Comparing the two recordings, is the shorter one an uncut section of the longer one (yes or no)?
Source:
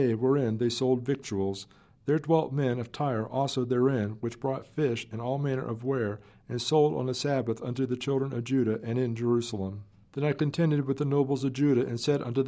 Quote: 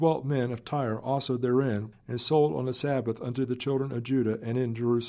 no